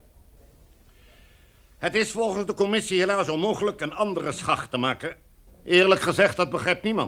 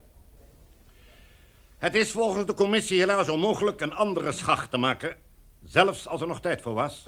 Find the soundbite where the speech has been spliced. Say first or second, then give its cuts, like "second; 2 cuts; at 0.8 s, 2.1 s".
first; 1 cut; at 5.5 s